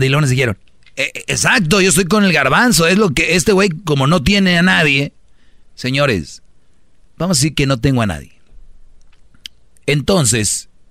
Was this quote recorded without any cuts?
yes; 0 cuts

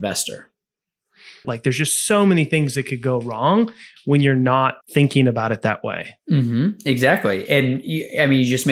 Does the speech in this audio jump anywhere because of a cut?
yes; 2 cuts; at 1.4 s, 4.8 s

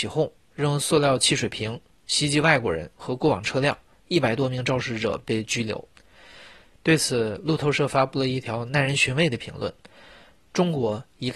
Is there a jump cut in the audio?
yes; 1 cut; at 6.7 s

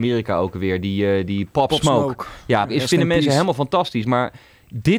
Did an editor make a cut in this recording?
yes; 1 cut; at 2.7 s

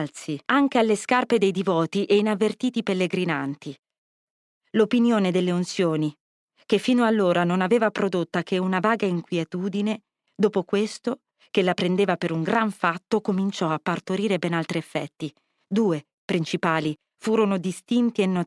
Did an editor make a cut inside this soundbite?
yes; 1 cut; at 10.3 s

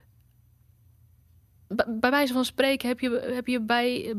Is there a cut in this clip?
no; 0 cuts

